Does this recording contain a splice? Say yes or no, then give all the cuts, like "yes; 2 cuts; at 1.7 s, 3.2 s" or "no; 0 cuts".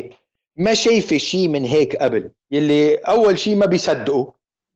yes; 1 cut; at 2.4 s